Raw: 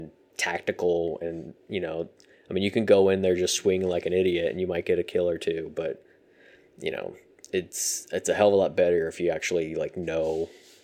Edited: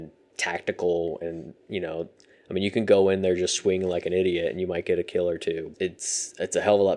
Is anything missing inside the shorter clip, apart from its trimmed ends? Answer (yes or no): yes